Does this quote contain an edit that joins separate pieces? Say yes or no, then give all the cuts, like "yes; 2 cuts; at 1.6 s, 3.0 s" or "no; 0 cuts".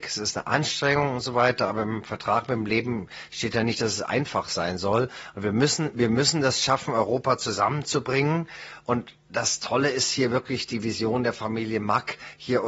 no; 0 cuts